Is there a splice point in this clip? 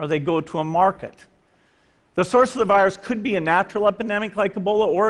no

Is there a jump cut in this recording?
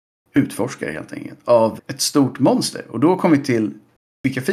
yes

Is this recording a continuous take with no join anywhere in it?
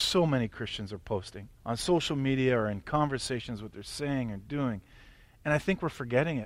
no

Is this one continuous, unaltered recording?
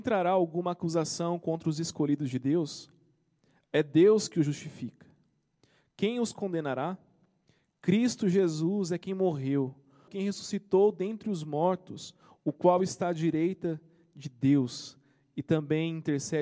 no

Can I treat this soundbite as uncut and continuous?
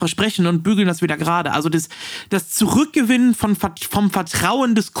yes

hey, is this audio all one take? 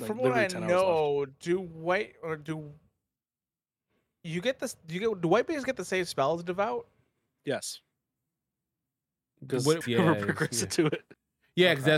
no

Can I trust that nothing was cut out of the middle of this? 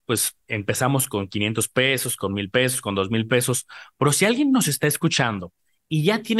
yes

